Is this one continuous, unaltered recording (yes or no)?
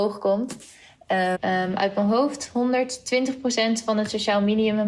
no